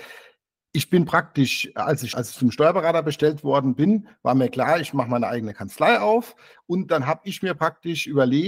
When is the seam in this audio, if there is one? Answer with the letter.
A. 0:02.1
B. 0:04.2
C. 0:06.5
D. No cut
A